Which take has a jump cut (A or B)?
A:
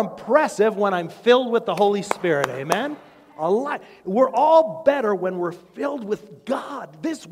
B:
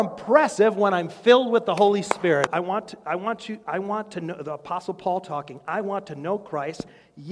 B